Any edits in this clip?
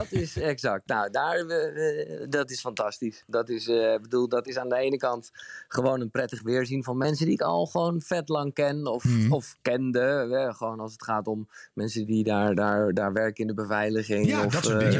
no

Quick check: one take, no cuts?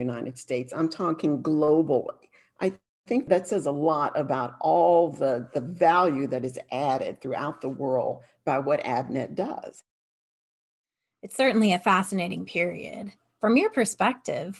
no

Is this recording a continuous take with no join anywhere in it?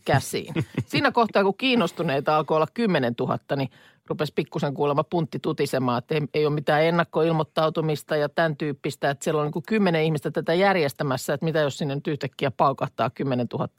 yes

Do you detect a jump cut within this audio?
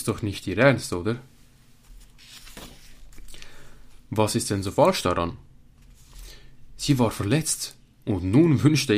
no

